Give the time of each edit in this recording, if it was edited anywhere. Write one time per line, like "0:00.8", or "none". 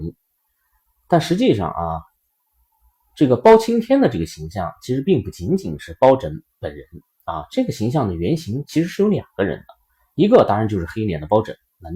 none

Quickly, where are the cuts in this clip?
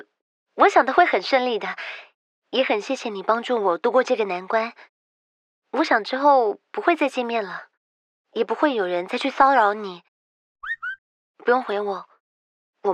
none

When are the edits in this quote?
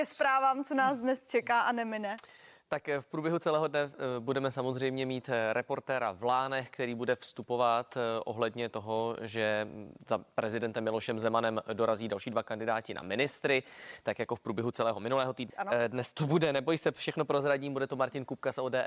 0:15.5

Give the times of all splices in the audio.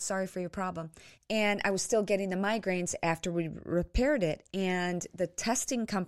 0:01.1

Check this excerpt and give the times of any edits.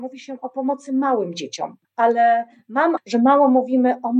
0:01.8
0:03.0

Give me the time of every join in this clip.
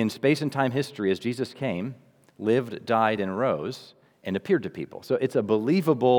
none

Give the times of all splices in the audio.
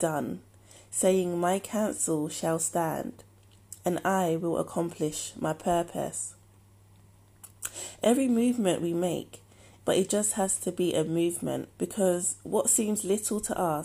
0:09.8
0:11.7

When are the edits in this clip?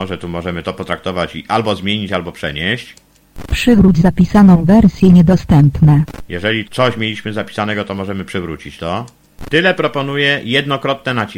0:06.6
0:09.5

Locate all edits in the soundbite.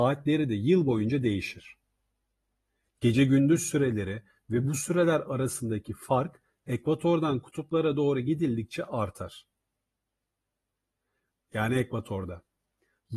0:11.3

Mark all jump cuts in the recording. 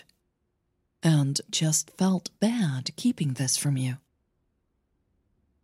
0:01.5

